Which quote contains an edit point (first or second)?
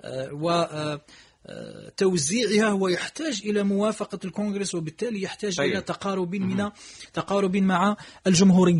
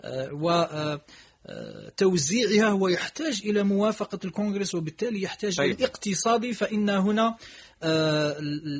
second